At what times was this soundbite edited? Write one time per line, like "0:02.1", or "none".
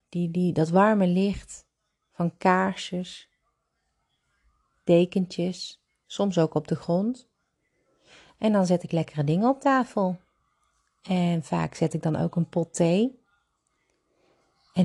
0:06.0